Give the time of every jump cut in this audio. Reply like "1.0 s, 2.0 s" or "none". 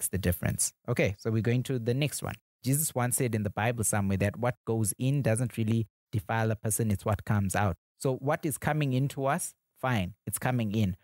2.6 s